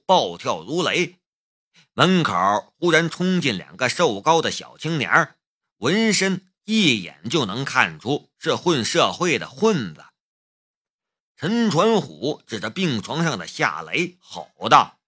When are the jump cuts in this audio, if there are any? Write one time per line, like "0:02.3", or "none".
0:06.5
0:11.2